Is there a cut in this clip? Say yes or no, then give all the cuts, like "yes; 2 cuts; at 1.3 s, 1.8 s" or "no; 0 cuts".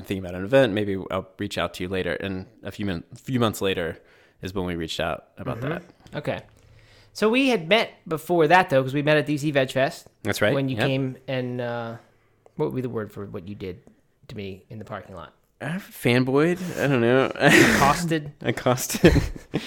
no; 0 cuts